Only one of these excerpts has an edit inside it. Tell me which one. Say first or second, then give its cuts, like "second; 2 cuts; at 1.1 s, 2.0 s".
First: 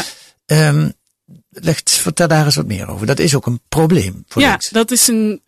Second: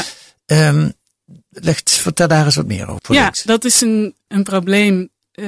second; 2 cuts; at 3.0 s, 4.3 s